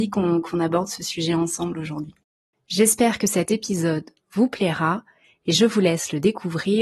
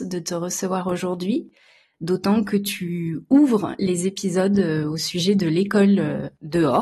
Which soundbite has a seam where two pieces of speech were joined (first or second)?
first